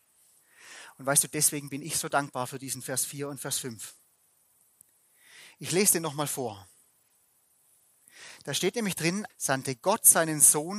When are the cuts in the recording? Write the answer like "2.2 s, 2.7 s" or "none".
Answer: 9.3 s

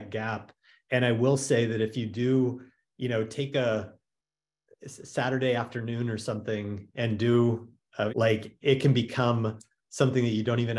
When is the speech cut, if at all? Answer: 8.1 s

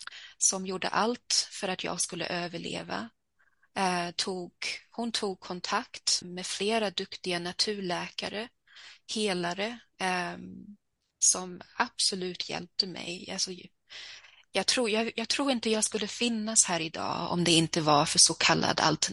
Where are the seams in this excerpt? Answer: 6.2 s

